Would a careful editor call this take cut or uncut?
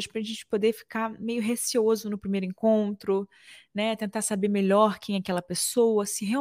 uncut